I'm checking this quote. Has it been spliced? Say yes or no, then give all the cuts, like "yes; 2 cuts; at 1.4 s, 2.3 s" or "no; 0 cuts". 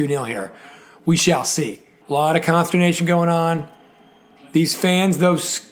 yes; 1 cut; at 2.0 s